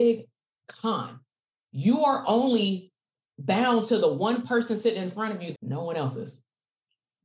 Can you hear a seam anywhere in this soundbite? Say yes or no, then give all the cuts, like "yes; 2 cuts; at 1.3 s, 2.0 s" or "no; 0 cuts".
yes; 1 cut; at 5.5 s